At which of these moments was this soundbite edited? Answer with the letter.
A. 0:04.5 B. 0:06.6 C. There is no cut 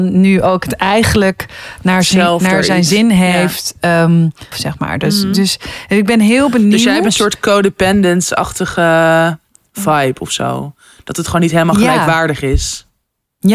A